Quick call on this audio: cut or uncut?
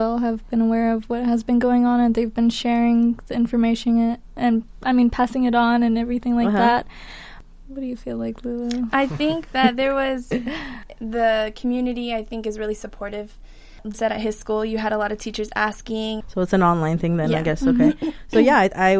cut